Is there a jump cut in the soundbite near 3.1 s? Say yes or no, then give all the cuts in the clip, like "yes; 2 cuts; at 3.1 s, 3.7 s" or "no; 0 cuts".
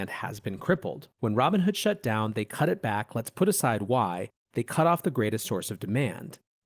no; 1 cut; at 1.1 s